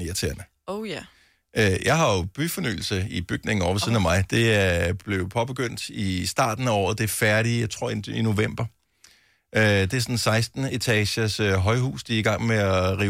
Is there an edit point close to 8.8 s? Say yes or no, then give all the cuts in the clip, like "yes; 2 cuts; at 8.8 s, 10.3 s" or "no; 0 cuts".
no; 0 cuts